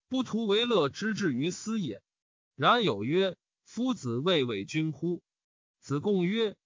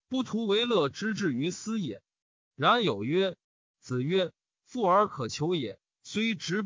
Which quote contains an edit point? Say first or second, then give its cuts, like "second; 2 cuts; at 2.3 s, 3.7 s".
second; 1 cut; at 3.4 s